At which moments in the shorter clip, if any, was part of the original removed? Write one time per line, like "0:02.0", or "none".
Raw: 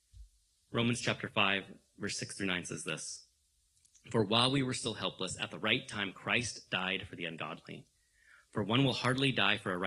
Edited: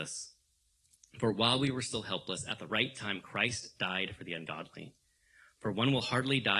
none